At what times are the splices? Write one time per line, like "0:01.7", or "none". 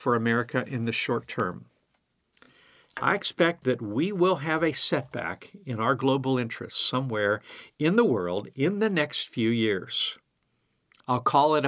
none